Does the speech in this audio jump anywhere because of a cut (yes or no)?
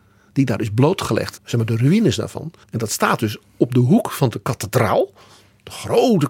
yes